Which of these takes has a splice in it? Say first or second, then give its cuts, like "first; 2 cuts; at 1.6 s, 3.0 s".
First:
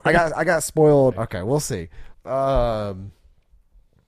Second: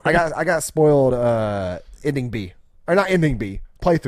first; 2 cuts; at 1.1 s, 2.1 s